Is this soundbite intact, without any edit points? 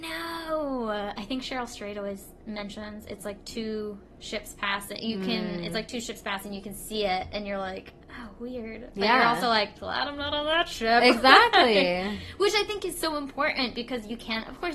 yes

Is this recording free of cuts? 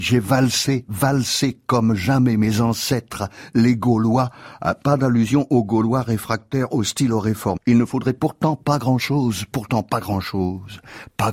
no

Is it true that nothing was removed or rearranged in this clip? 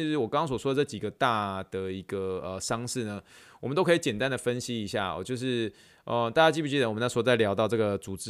yes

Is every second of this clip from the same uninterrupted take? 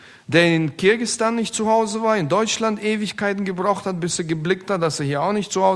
yes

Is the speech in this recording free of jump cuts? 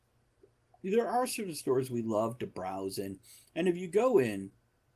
yes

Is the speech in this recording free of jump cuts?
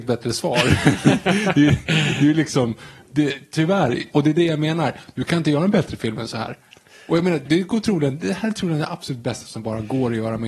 no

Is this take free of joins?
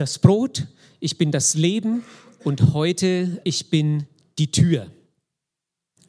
no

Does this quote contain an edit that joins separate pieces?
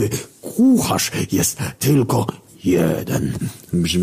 no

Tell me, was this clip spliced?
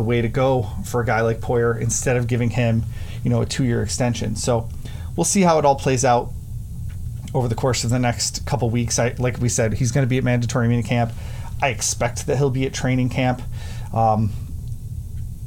no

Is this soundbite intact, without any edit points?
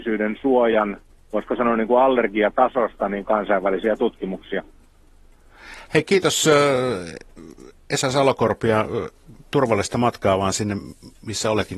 yes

